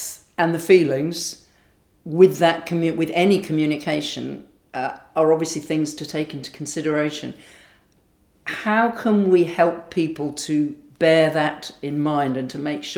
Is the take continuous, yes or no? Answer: yes